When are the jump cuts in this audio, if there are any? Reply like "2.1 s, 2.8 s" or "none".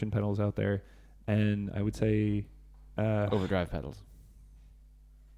none